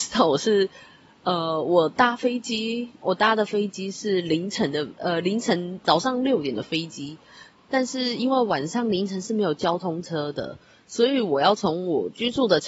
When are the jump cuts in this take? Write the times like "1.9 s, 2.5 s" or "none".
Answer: none